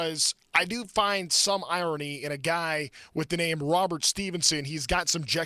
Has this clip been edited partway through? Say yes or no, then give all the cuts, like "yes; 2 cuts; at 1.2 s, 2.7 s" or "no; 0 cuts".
no; 0 cuts